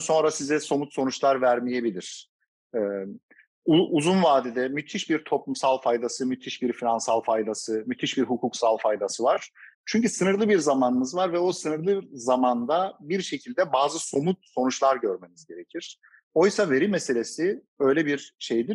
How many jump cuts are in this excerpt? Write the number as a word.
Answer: one